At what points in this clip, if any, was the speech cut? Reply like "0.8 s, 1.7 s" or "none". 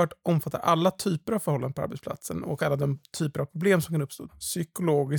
4.3 s